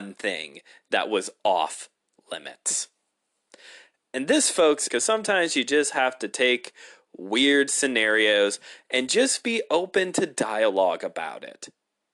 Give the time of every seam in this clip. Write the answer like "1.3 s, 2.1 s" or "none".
4.9 s